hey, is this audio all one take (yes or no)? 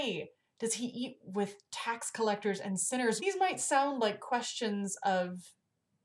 no